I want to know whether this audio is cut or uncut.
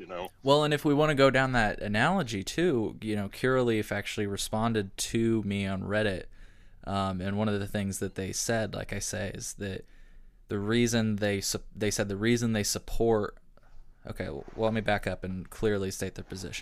uncut